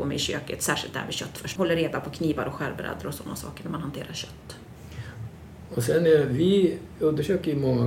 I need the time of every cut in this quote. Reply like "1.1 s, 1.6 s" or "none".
1.6 s